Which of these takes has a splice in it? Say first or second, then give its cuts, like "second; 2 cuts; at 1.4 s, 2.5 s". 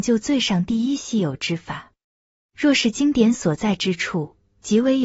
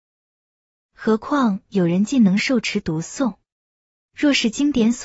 second; 1 cut; at 3.9 s